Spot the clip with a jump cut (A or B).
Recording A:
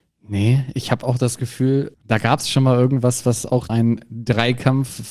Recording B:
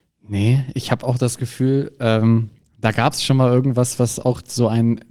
A